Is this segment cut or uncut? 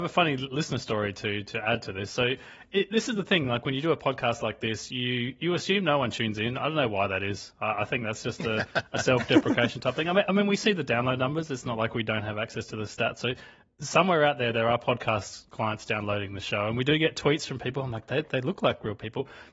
uncut